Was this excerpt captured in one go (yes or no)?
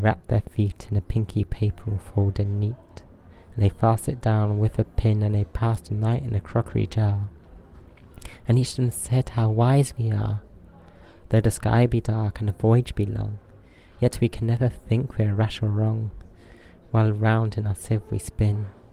yes